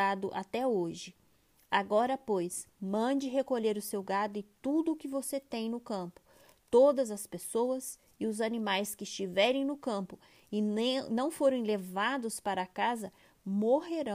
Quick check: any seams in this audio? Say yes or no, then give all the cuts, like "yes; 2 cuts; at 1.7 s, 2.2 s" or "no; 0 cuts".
no; 0 cuts